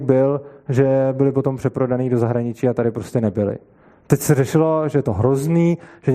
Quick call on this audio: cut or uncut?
uncut